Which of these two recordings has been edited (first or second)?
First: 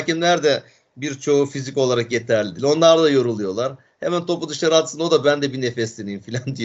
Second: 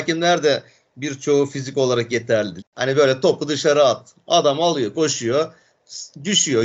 second